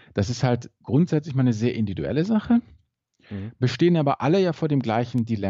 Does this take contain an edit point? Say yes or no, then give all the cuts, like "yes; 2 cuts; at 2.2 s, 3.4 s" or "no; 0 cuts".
no; 0 cuts